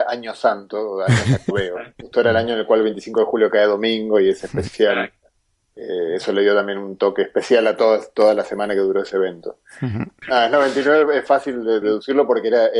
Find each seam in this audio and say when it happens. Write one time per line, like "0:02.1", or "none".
0:10.2
0:11.8